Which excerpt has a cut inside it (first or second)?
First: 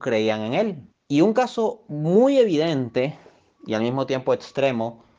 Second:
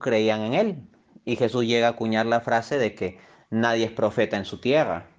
first